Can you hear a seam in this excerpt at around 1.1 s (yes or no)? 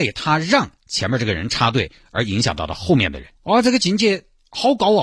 no